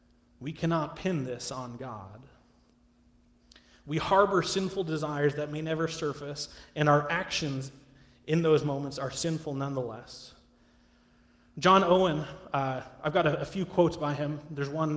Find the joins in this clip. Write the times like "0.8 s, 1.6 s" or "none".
none